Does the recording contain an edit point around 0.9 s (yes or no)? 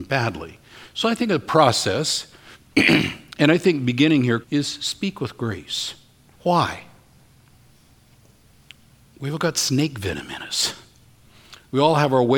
no